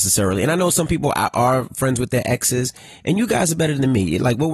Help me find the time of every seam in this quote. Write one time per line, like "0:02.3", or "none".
none